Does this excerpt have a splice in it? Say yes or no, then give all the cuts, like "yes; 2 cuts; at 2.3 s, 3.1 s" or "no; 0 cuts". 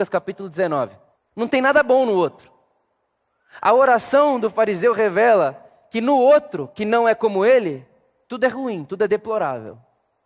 yes; 1 cut; at 1.2 s